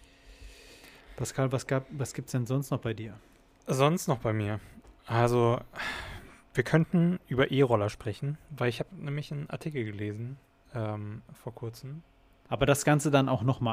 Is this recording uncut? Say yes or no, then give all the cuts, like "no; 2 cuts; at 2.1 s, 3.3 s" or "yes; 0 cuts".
no; 1 cut; at 12.5 s